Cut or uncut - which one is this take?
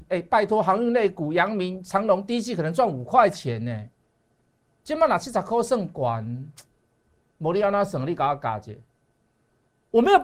uncut